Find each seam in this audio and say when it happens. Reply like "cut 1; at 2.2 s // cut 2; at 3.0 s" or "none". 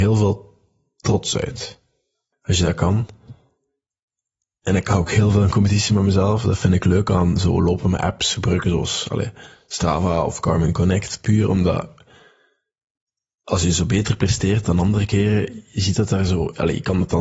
cut 1; at 2.3 s

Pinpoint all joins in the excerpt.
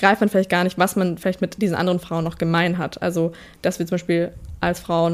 none

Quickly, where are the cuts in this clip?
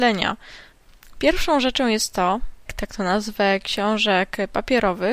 cut 1; at 2.7 s

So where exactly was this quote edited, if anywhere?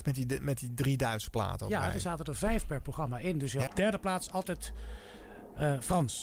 cut 1; at 3.7 s

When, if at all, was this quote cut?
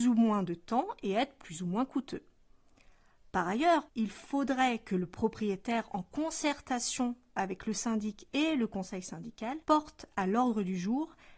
cut 1; at 3.9 s // cut 2; at 9.6 s

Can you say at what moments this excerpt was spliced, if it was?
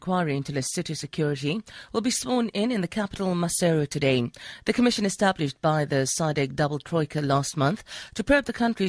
none

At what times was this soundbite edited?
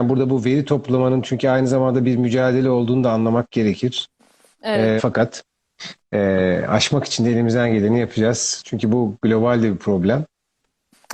cut 1; at 5.0 s

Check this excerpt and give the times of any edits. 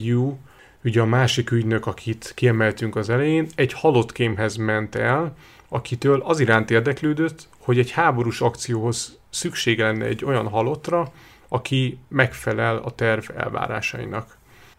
none

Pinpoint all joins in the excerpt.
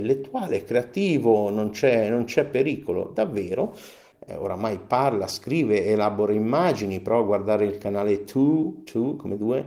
cut 1; at 4.1 s

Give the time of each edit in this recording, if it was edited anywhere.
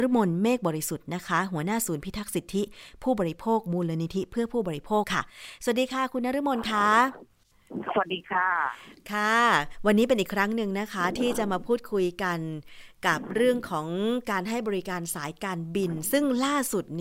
cut 1; at 5.0 s

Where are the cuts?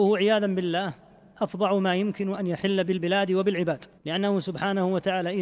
cut 1; at 4.0 s

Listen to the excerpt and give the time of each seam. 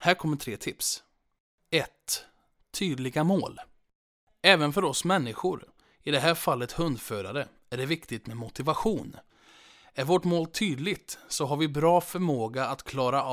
none

